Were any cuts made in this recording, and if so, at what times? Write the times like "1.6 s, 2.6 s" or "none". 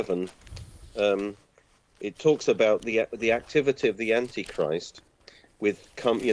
none